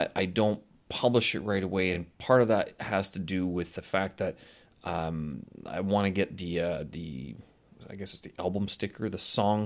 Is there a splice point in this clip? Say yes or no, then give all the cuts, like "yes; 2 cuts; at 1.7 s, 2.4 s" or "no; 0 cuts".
no; 0 cuts